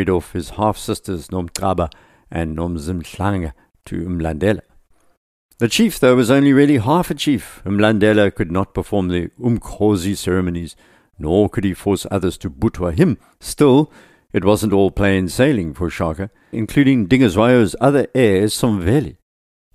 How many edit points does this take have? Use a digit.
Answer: 2